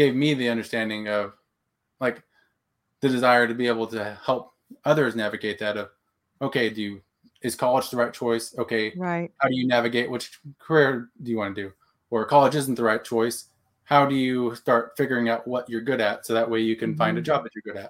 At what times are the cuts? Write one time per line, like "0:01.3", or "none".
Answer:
none